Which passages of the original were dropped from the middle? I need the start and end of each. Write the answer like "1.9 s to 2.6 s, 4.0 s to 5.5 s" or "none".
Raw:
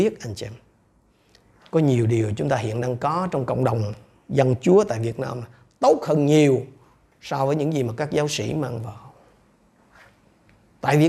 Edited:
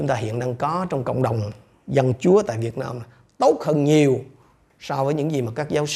none